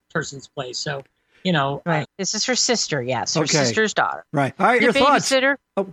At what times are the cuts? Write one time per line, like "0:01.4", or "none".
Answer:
0:02.0
0:04.8